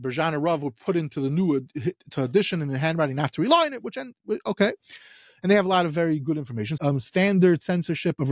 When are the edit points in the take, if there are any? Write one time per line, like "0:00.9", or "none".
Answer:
0:06.8